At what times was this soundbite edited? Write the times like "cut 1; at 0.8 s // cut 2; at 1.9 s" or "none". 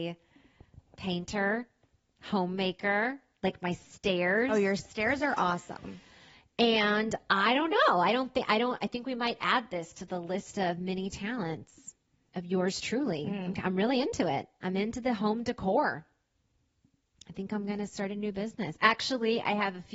none